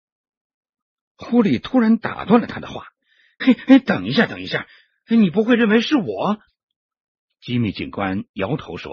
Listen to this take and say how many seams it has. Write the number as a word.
two